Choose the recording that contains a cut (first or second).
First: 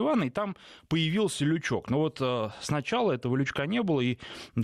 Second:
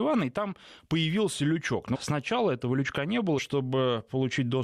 second